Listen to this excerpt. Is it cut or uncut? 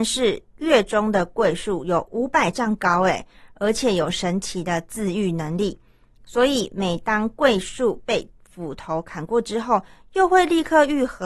uncut